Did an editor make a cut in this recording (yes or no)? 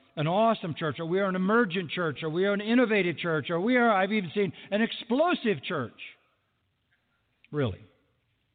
yes